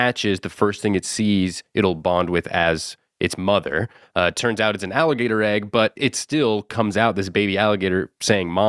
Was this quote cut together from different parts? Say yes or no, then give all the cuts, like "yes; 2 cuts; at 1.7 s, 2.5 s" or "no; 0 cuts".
no; 0 cuts